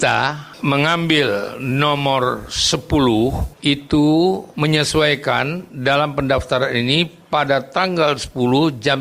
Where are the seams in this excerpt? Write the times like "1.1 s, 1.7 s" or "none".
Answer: none